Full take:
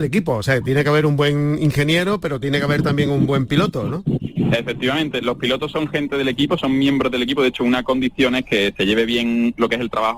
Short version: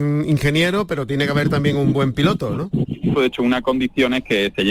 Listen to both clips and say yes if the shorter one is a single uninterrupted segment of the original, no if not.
no